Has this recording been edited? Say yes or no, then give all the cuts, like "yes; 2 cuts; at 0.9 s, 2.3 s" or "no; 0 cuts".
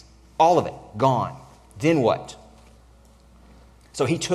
no; 0 cuts